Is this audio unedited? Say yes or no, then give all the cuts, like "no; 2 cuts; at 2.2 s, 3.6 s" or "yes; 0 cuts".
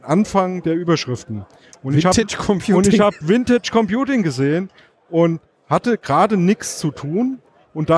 yes; 0 cuts